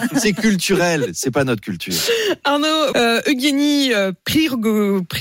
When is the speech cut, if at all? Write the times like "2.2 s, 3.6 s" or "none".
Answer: 2.9 s